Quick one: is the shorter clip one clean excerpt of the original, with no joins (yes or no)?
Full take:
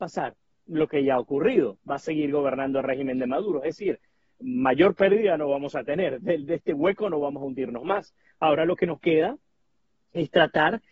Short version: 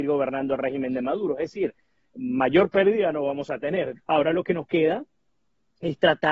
no